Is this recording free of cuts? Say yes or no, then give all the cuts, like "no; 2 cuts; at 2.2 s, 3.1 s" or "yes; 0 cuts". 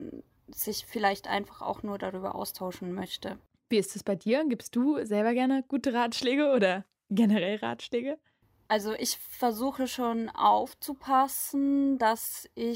yes; 0 cuts